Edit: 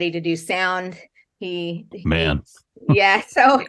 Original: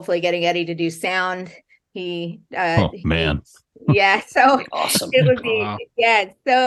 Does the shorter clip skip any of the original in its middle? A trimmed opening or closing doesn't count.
yes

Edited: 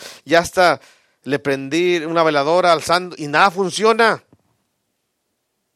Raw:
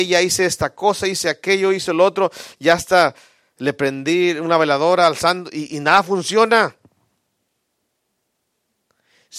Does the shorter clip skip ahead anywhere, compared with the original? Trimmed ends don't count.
yes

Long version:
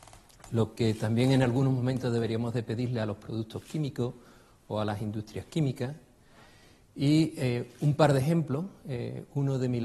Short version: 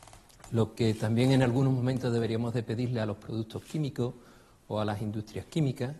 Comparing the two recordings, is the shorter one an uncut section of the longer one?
yes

